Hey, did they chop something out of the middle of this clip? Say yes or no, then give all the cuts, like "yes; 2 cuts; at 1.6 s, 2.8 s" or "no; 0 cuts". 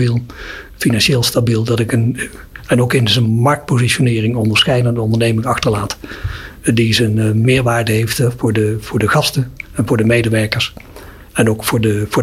no; 0 cuts